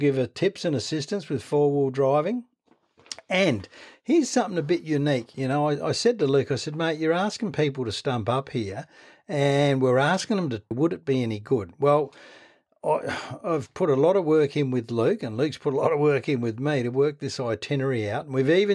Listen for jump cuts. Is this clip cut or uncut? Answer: cut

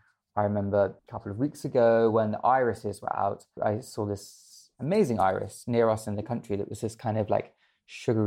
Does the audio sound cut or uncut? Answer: cut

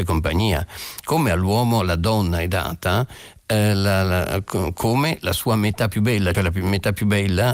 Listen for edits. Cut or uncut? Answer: cut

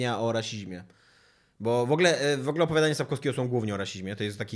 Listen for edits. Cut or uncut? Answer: uncut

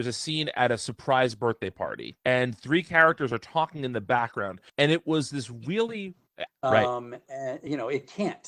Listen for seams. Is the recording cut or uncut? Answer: cut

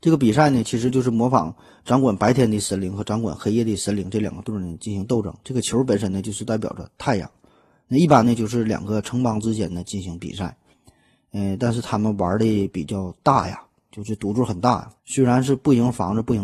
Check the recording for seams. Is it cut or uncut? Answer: cut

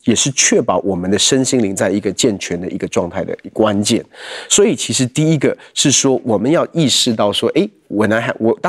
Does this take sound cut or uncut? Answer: uncut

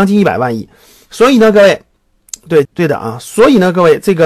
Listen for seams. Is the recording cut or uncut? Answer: cut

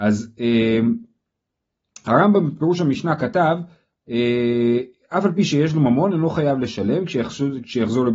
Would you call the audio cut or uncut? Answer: uncut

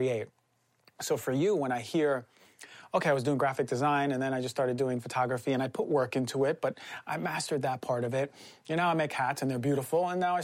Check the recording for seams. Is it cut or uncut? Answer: uncut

